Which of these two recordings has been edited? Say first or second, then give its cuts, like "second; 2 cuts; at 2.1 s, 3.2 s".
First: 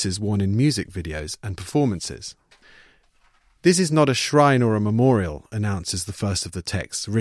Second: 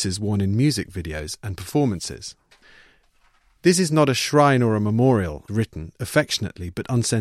second; 1 cut; at 5.5 s